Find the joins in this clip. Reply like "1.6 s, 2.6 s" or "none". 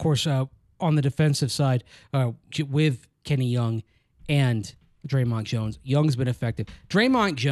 2.5 s